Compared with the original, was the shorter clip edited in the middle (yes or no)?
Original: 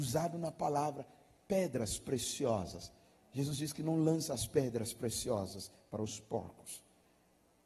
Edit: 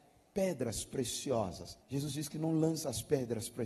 yes